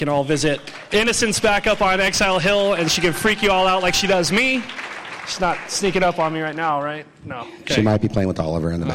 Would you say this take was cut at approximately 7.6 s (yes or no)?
no